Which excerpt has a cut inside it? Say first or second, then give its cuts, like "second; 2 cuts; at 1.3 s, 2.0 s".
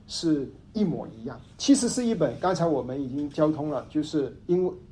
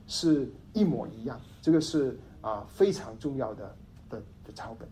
first; 1 cut; at 1.5 s